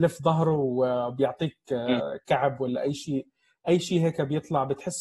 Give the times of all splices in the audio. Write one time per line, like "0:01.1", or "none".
none